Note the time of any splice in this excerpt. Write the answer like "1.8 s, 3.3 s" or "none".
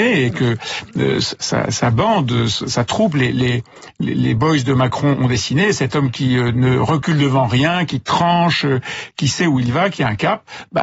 none